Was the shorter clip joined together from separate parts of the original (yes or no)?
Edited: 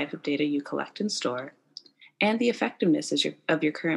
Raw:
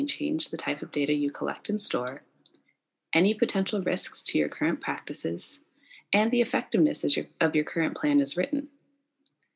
yes